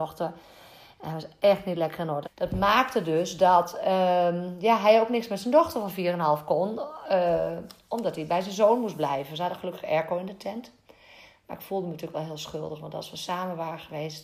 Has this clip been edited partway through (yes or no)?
yes